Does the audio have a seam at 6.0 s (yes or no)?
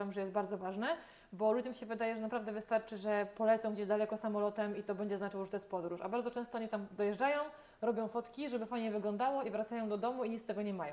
no